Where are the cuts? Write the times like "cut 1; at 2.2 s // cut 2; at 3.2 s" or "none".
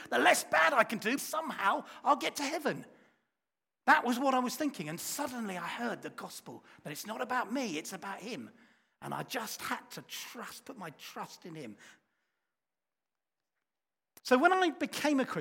cut 1; at 1.2 s // cut 2; at 14.2 s